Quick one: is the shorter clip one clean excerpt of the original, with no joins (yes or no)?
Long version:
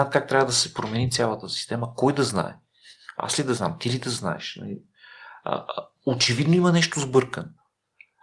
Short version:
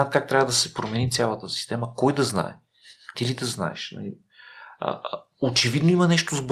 no